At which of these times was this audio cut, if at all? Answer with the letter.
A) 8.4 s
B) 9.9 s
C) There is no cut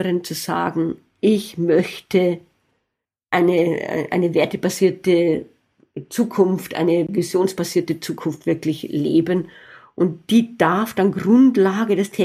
C